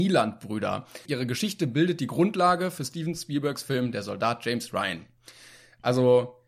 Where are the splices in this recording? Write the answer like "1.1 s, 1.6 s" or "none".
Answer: 1.1 s

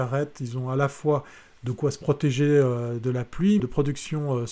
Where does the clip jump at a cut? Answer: 3.6 s

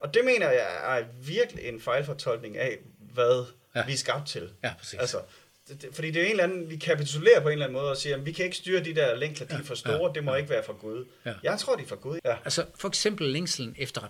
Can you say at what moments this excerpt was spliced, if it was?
12.2 s

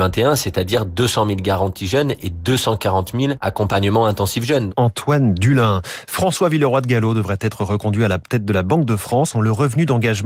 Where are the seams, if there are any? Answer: 4.7 s, 9.3 s

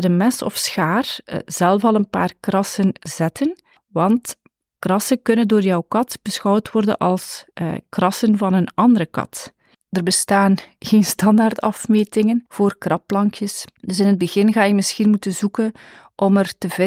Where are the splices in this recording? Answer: 9.7 s, 12.5 s, 13.7 s

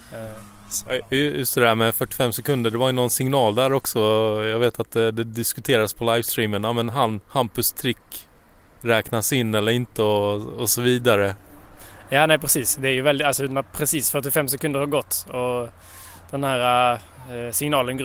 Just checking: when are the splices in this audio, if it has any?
7.2 s

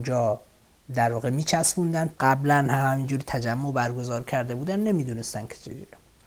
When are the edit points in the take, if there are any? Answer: 2.1 s

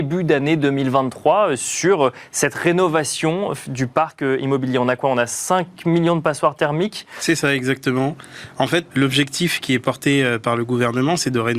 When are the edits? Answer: 8.9 s

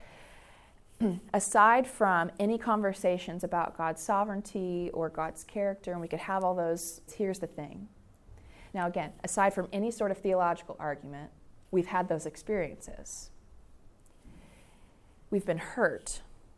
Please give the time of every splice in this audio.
7.1 s, 8.7 s, 11.6 s

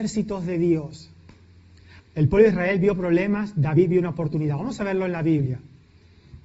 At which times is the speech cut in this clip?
2.0 s

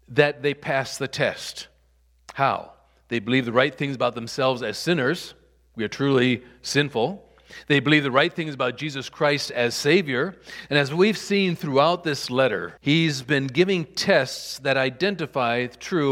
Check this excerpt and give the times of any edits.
10.7 s, 12.8 s

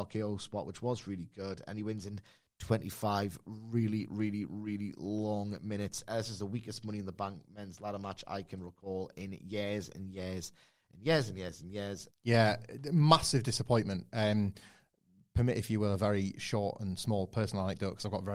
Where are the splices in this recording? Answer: 12.1 s

